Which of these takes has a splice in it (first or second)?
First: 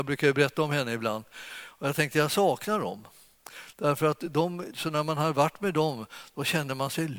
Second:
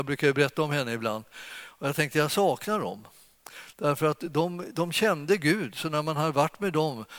first